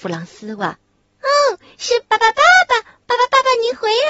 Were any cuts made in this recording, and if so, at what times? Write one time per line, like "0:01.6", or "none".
0:01.0

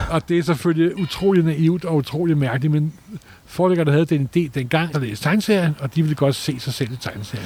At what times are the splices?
0:04.9

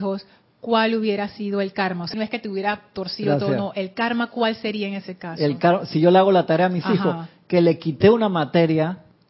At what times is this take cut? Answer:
0:02.1

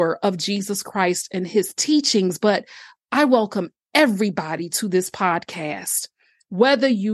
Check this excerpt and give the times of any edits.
none

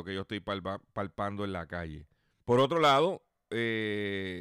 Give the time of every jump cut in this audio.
0:02.4

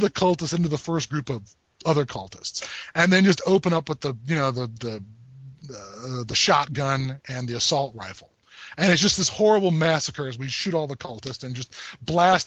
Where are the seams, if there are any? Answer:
none

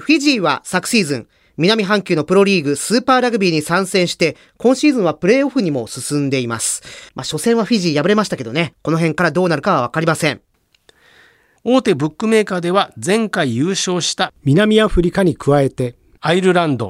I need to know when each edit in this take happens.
0:07.1
0:11.6

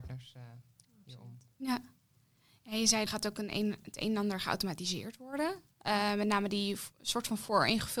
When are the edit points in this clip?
0:01.5
0:03.1

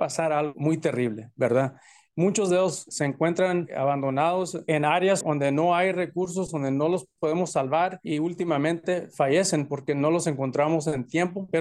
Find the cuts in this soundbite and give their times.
0:05.2

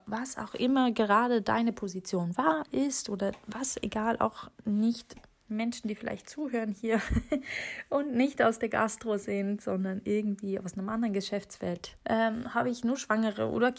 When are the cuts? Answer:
0:12.0

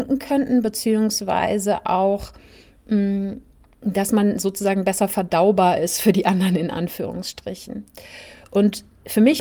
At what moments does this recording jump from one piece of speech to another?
none

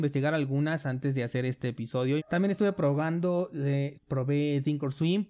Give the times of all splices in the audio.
0:02.2
0:03.9

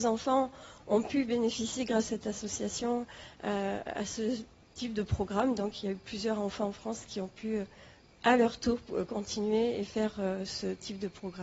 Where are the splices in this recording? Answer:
none

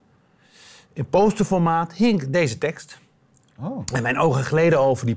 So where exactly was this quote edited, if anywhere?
none

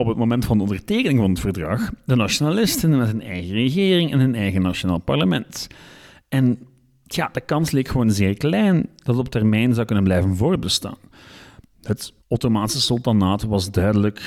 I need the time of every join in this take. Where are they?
0:12.2

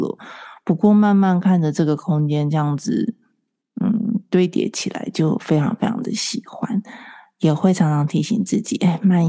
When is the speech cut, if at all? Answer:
none

